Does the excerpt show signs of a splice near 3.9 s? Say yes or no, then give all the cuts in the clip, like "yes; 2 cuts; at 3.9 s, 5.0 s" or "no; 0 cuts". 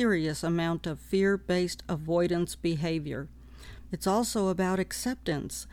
yes; 1 cut; at 3.9 s